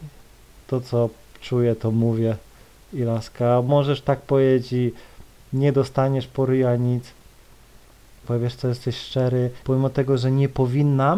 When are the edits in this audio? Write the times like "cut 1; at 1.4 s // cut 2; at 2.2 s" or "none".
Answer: cut 1; at 8.2 s // cut 2; at 9.6 s